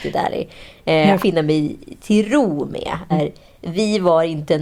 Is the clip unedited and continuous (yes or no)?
no